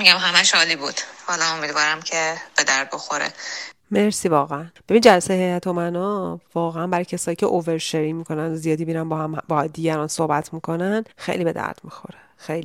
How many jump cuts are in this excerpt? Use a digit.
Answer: 1